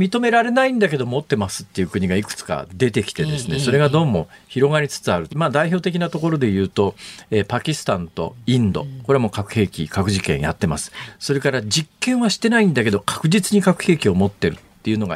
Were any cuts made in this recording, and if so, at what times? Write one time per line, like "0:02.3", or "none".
0:05.3